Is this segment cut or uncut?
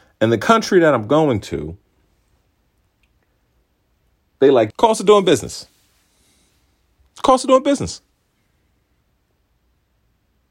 cut